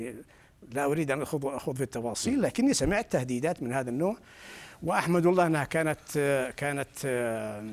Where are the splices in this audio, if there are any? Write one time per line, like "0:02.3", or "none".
none